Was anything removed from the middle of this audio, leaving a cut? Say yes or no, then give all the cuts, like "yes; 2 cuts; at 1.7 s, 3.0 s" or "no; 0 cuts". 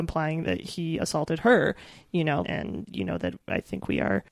yes; 1 cut; at 2.4 s